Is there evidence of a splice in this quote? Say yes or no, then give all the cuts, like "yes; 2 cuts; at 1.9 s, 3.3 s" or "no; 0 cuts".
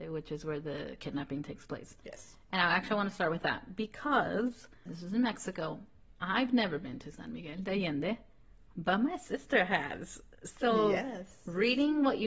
yes; 1 cut; at 4.9 s